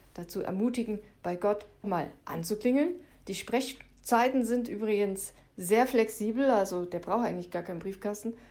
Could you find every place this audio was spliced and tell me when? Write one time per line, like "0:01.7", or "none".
0:01.8